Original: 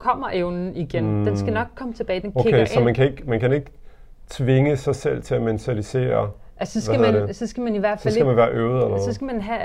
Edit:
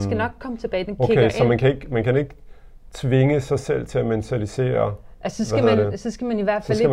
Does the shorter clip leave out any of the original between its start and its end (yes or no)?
no